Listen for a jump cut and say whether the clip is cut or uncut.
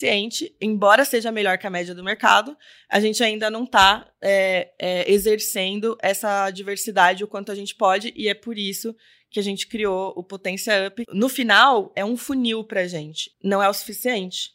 cut